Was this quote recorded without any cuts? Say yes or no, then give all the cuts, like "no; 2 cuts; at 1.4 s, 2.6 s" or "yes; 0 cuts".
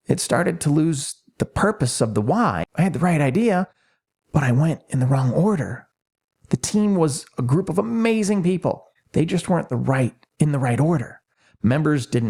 no; 1 cut; at 2.6 s